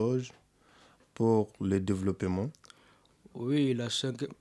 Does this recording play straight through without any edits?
yes; 0 cuts

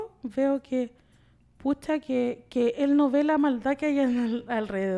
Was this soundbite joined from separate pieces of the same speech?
no; 0 cuts

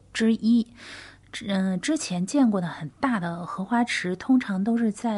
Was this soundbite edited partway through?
no; 0 cuts

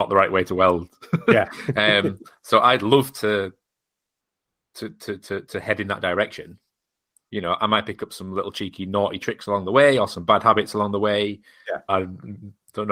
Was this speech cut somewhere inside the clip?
yes; 1 cut; at 11.9 s

